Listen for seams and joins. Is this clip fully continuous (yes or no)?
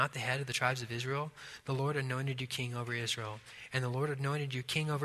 yes